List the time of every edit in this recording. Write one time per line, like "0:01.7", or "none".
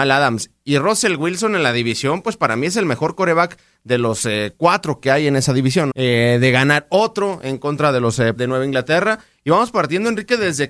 0:05.9
0:08.4